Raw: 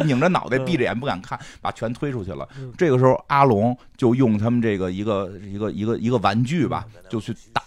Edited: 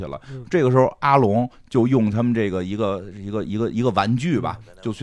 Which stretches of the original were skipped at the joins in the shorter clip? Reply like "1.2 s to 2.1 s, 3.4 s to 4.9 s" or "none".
none

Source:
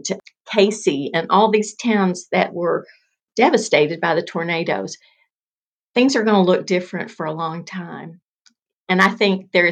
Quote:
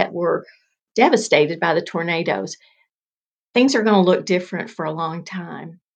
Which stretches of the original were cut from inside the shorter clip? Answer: none

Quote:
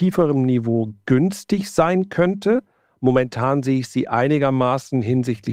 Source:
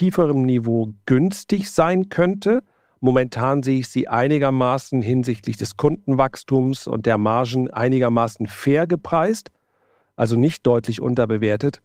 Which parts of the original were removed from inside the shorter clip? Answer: none

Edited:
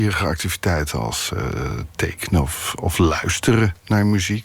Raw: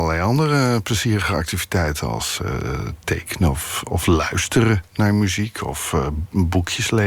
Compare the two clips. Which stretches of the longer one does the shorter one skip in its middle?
none

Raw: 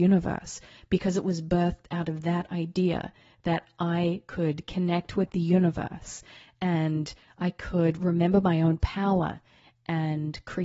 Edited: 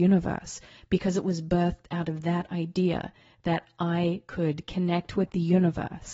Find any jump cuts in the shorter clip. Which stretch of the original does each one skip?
none

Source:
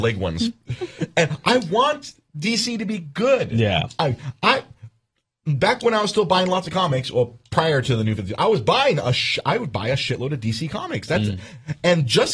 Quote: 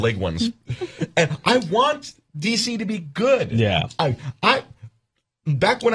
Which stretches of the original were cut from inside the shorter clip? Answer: none

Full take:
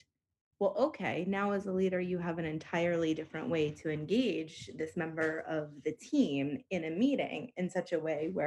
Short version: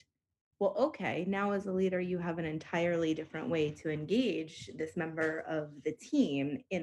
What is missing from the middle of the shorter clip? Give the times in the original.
none

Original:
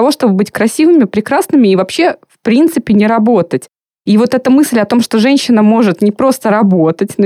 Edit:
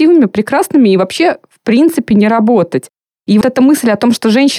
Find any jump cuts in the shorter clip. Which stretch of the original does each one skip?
4.2 s to 4.3 s

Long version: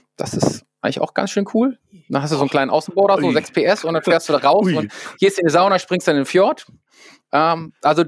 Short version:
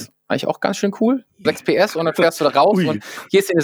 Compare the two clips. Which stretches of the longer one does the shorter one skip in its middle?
2.0 s to 3.3 s

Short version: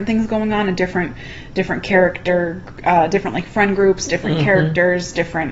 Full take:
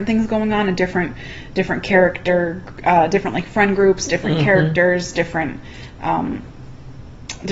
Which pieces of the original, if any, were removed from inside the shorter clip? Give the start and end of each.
none

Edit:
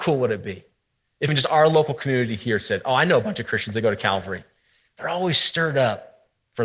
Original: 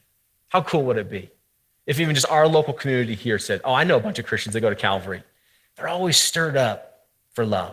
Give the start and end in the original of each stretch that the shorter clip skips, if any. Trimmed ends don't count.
1.9 s to 2.1 s

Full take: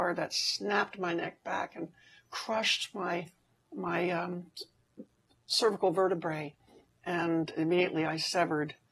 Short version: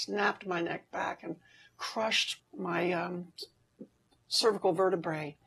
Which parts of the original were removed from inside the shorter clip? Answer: 2.9 s to 3.6 s

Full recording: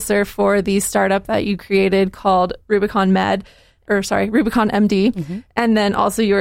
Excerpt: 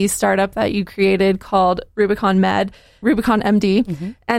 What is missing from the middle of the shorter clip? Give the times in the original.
3.7 s to 4.3 s

